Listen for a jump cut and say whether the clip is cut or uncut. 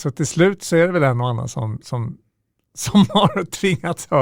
uncut